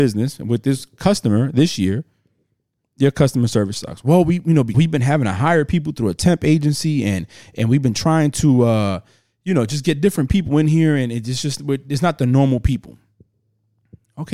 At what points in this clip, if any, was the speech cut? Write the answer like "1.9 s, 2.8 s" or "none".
4.7 s